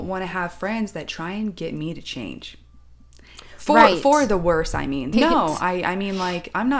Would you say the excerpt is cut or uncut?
cut